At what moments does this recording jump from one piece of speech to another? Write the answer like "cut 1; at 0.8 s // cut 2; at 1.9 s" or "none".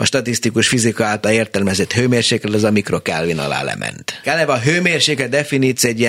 cut 1; at 4.2 s